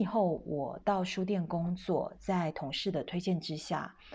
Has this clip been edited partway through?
no; 0 cuts

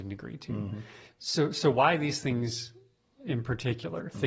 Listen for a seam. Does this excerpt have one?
no; 0 cuts

